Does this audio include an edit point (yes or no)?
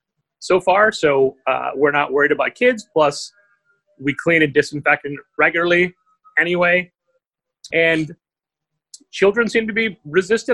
yes